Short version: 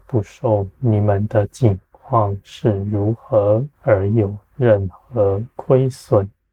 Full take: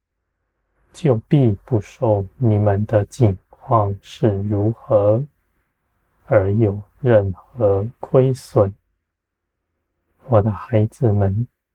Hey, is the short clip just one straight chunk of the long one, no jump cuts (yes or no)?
no